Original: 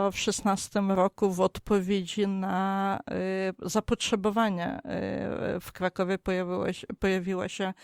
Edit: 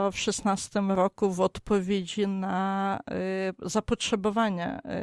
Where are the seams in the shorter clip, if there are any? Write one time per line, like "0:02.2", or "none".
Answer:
none